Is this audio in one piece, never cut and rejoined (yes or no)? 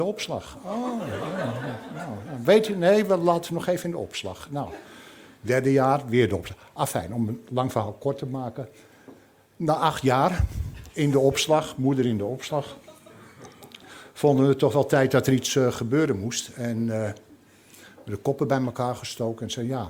yes